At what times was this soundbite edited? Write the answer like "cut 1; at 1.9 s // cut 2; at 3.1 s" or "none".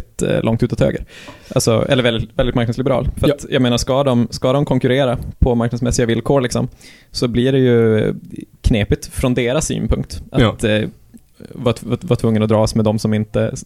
none